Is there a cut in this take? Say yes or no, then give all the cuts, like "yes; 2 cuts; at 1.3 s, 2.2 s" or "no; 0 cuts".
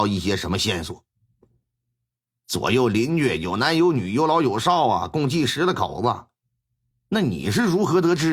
yes; 1 cut; at 6.9 s